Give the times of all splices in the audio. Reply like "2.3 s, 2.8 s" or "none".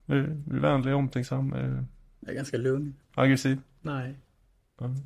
3.1 s